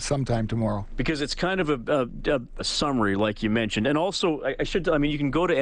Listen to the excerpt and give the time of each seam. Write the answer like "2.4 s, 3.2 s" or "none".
2.6 s